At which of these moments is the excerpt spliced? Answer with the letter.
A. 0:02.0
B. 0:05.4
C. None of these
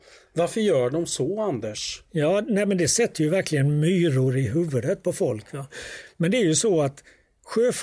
C